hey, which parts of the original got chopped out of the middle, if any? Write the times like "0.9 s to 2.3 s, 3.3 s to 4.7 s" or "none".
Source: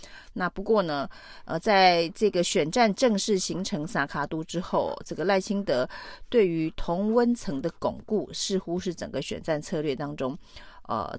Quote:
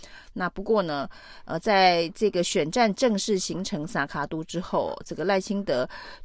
none